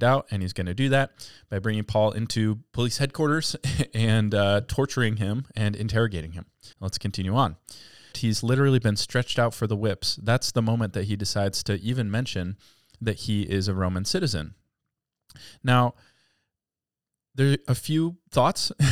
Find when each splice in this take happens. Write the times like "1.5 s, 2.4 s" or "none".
6.7 s, 8.1 s